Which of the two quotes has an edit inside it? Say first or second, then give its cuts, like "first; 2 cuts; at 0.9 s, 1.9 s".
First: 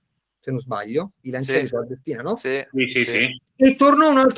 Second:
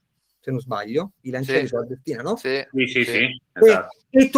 first; 1 cut; at 3.5 s